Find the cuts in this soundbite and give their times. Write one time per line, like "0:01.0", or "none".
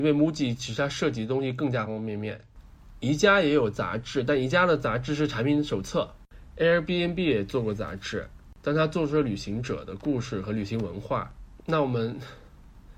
0:01.9
0:11.6